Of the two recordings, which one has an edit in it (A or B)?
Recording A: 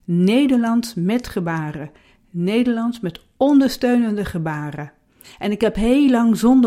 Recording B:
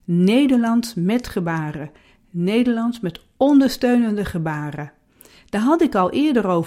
A